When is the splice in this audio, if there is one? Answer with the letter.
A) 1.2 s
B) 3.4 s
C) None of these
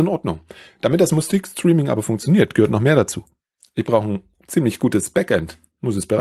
C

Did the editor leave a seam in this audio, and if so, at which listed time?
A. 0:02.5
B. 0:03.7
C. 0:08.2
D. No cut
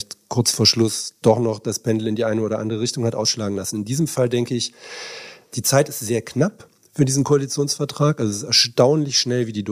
D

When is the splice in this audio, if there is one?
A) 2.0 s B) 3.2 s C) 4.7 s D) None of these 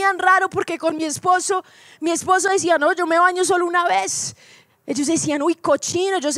D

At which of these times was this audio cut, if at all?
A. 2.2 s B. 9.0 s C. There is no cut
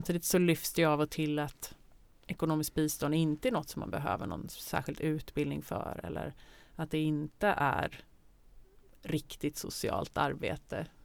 C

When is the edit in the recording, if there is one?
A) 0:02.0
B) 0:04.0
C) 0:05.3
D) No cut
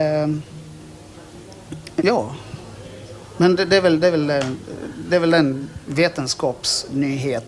A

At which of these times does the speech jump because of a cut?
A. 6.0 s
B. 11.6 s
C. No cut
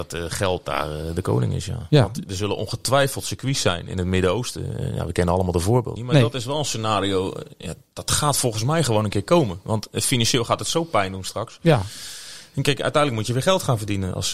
A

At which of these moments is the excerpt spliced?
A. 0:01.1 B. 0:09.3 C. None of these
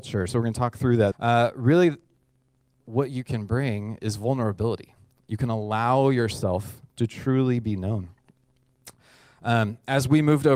A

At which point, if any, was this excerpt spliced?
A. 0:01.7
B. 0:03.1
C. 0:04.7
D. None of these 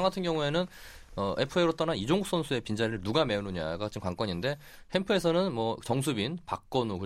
D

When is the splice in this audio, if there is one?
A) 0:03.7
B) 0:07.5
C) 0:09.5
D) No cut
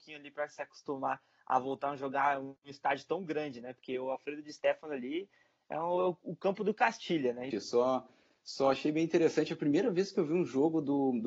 B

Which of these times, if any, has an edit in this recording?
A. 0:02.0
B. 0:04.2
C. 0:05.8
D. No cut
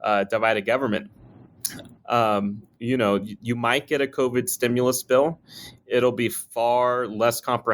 A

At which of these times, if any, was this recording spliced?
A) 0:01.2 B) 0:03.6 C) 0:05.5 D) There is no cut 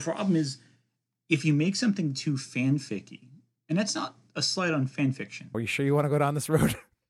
C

